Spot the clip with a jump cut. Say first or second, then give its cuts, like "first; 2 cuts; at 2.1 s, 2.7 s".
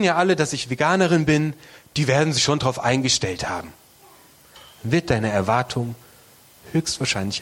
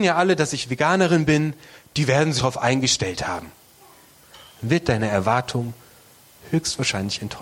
second; 1 cut; at 2.4 s